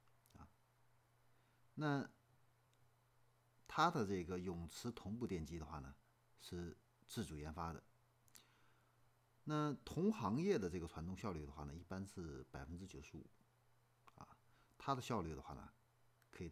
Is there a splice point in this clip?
no; 0 cuts

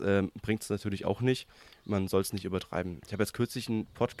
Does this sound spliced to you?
no; 0 cuts

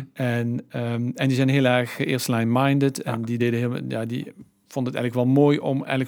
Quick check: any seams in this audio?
no; 0 cuts

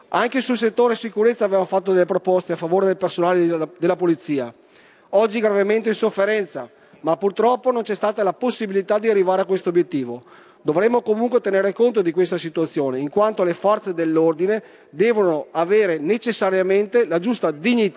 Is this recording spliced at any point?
no; 0 cuts

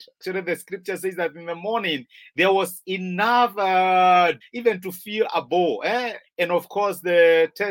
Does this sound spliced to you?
yes; 2 cuts; at 4.4 s, 6.2 s

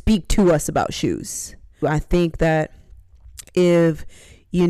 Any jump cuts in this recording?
yes; 1 cut; at 1.8 s

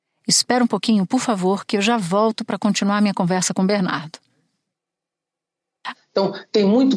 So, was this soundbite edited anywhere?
yes; 1 cut; at 5.9 s

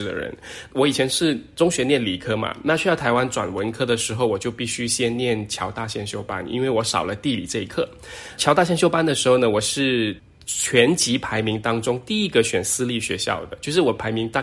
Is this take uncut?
yes; 0 cuts

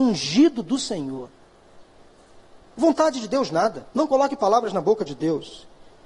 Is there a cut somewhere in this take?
yes; 2 cuts; at 2.6 s, 3.9 s

